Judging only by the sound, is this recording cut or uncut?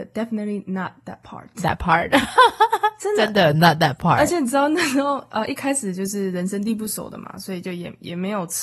uncut